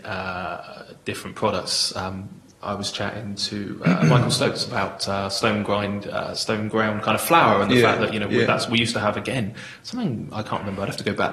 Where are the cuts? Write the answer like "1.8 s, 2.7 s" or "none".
none